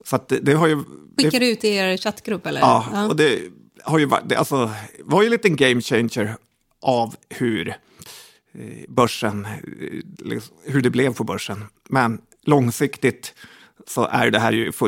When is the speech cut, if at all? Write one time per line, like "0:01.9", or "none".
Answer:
0:01.2